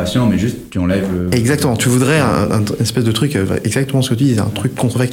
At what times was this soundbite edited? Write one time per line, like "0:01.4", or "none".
none